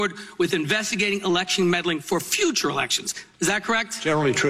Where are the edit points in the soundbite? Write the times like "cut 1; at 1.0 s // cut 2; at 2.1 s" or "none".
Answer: none